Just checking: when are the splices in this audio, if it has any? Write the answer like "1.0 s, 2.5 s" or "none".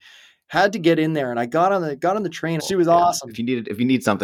2.6 s